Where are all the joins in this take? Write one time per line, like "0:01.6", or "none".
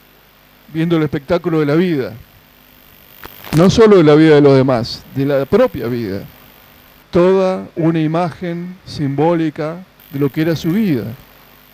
0:07.0
0:10.0